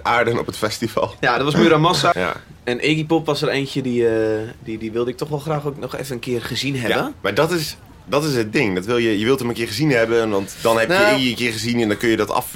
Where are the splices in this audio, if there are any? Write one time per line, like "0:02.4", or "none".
0:02.1